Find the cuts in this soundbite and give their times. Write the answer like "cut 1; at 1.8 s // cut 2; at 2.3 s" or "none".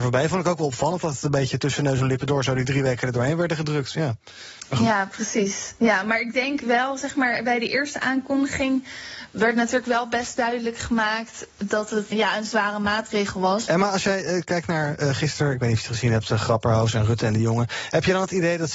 cut 1; at 12.1 s // cut 2; at 13.7 s